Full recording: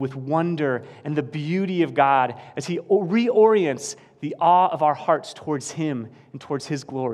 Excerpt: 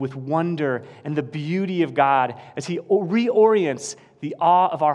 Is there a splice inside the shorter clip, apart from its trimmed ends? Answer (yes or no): no